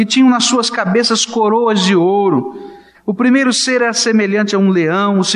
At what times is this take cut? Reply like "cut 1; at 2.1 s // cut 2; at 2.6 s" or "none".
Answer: cut 1; at 2.9 s